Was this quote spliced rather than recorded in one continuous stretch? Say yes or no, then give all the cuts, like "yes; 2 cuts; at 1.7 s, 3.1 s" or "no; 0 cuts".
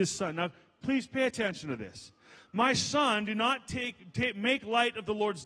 no; 0 cuts